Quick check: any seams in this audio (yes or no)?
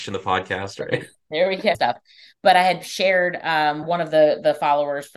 yes